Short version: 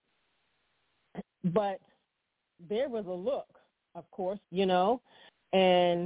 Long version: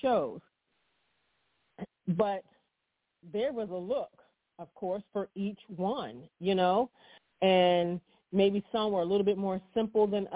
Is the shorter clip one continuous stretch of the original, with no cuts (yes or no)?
no